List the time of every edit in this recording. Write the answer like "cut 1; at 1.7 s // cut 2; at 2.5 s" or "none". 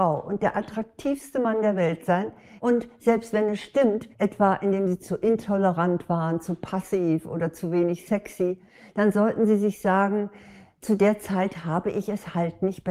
cut 1; at 2.6 s // cut 2; at 4.1 s